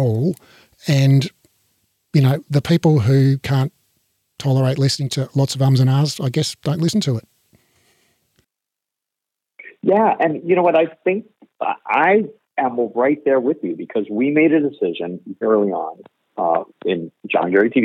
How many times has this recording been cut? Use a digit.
1